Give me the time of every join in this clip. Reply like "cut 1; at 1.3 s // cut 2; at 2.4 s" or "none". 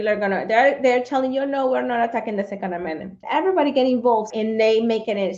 cut 1; at 3.2 s // cut 2; at 4.3 s